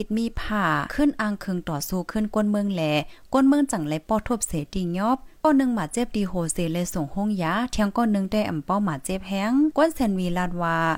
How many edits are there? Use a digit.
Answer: 0